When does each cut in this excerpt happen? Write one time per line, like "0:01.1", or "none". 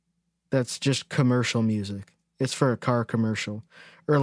none